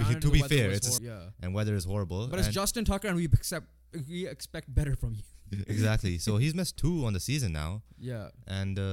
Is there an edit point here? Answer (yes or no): yes